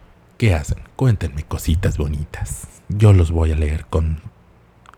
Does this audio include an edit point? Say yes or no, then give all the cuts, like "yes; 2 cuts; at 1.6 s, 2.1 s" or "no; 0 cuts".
no; 0 cuts